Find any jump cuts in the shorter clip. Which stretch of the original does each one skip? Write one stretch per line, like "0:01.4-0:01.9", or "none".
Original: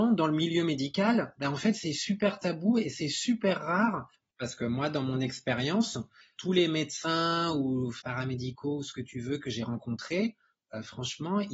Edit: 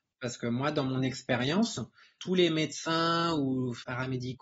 none